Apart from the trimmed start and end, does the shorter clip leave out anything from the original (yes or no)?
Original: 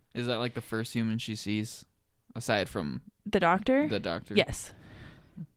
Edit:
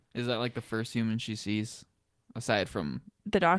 no